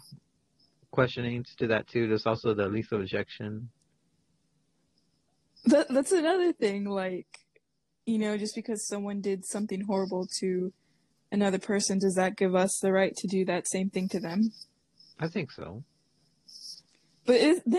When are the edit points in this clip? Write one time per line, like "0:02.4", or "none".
none